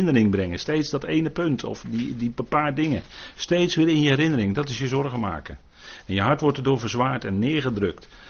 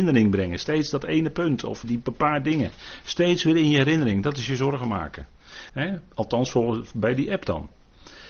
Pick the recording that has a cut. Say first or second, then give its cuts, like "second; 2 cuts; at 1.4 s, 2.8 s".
second; 2 cuts; at 1.8 s, 5.7 s